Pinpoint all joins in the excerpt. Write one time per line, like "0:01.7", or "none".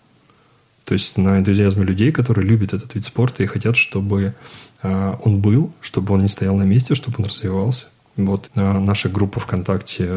0:08.5